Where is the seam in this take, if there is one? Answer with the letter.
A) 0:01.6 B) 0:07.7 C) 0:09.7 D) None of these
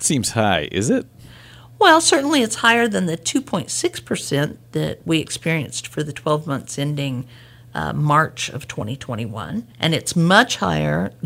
C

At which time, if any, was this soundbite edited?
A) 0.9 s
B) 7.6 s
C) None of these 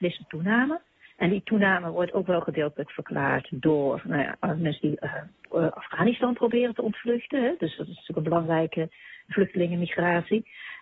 C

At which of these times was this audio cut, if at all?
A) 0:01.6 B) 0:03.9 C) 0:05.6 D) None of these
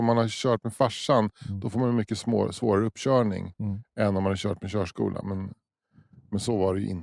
D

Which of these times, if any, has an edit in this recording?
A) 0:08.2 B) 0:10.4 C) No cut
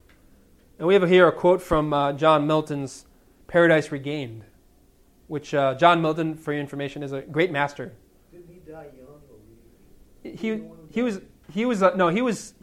A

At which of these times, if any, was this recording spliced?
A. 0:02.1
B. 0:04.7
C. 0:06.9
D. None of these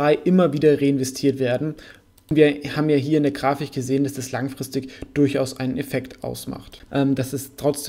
C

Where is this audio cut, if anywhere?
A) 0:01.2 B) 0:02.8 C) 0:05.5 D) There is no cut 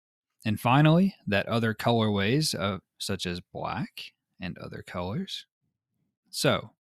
B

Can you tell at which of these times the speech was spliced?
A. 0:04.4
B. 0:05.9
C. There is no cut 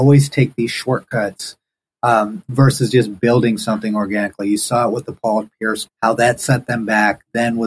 B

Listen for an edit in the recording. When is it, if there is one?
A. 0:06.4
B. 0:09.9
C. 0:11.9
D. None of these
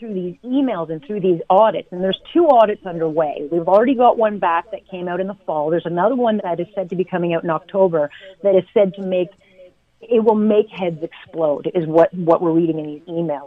A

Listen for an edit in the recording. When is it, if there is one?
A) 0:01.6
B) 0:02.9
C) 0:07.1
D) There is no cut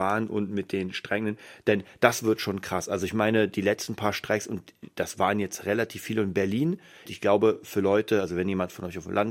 C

